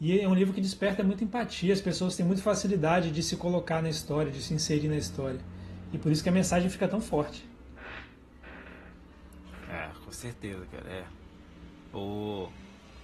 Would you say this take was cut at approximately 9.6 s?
no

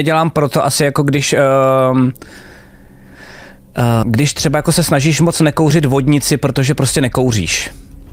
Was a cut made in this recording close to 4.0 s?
yes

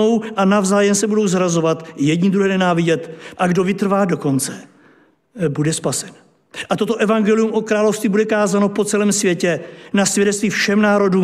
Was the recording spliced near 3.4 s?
yes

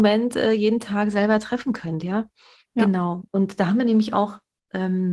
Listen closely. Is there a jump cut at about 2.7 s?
no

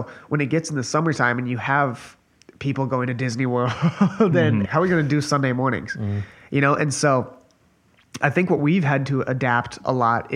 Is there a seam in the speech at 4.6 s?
yes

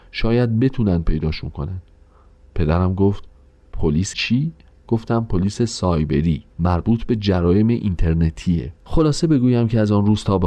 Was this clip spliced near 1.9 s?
no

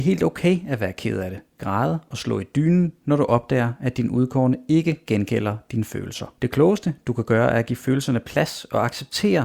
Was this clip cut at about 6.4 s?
yes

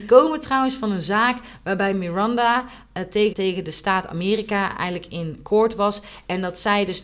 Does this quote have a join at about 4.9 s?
no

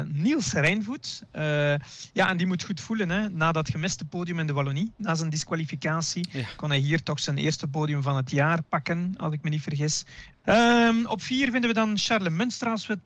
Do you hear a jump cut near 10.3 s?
yes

